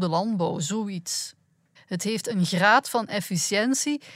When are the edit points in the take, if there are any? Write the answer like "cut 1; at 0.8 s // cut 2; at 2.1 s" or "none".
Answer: cut 1; at 1.8 s